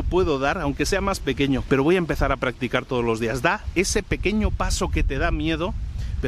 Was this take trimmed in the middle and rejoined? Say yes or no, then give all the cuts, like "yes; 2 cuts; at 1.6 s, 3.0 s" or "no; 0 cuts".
yes; 1 cut; at 1.7 s